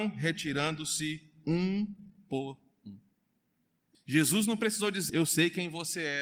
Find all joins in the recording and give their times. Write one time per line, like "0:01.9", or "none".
0:03.9
0:05.1